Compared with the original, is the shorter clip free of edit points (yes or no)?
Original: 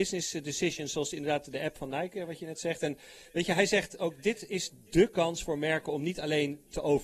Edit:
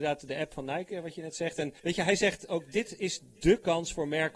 no